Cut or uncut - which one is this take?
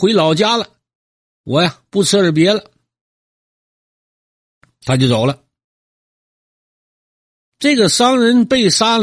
uncut